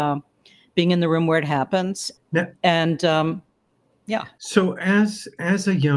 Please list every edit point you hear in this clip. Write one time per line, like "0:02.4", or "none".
0:02.2